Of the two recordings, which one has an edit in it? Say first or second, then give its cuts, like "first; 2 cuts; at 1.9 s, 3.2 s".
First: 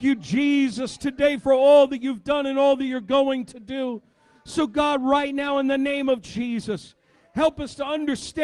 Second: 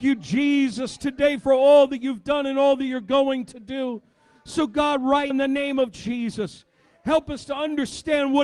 second; 1 cut; at 5.3 s